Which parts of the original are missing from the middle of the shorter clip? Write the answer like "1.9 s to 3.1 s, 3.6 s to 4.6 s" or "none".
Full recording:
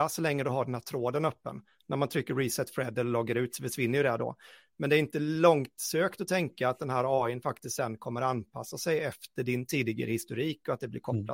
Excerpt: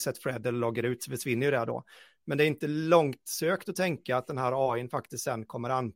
none